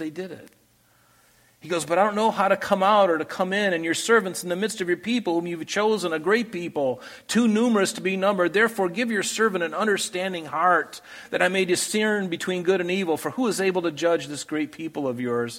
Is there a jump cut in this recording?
no; 0 cuts

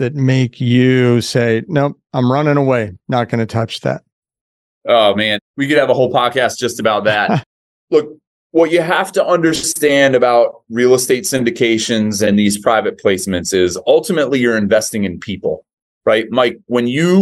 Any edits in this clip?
no; 0 cuts

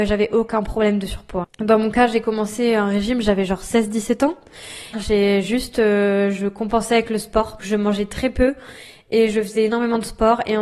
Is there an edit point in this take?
yes; 3 cuts; at 1.4 s, 4.9 s, 7.6 s

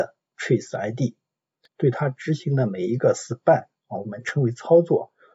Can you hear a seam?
yes; 1 cut; at 1.7 s

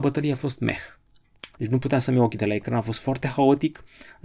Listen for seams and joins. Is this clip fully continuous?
no; 1 cut; at 1.6 s

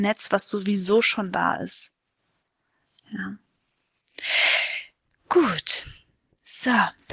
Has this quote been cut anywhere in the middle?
no; 0 cuts

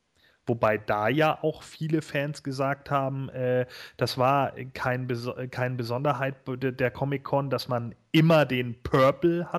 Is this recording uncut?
yes; 0 cuts

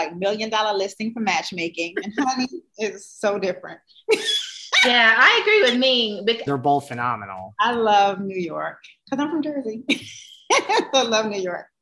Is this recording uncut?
no; 1 cut; at 6.5 s

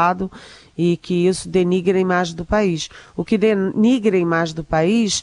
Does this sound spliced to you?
no; 0 cuts

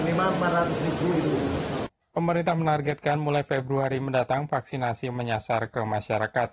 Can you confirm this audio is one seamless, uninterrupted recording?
yes; 0 cuts

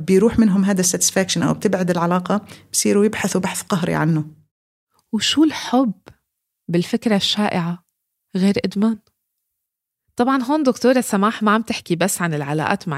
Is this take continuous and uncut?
yes; 0 cuts

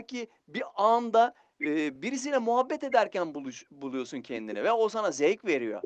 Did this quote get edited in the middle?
no; 0 cuts

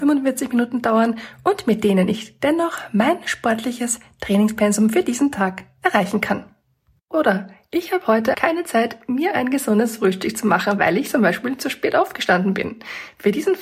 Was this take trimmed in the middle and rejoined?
yes; 1 cut; at 8.3 s

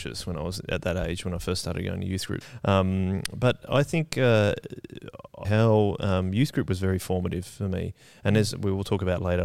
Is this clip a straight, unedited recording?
no; 2 cuts; at 2.4 s, 5.4 s

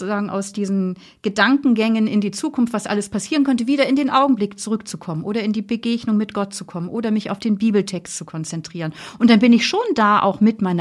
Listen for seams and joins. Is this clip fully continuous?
yes; 0 cuts

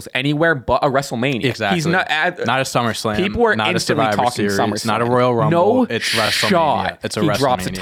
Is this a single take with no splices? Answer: yes; 0 cuts

